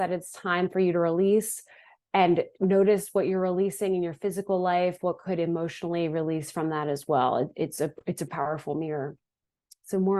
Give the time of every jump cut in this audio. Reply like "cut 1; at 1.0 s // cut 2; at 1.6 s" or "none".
cut 1; at 8.3 s